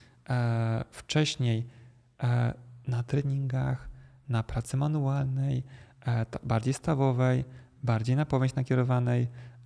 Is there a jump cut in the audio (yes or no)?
no